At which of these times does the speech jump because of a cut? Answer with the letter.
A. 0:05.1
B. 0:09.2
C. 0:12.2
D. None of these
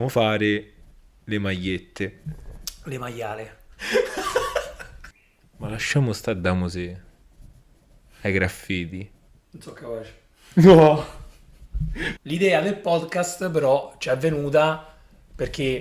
C